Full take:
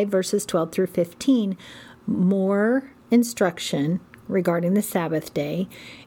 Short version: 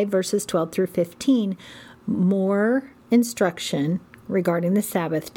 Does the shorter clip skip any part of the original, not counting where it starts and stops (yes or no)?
no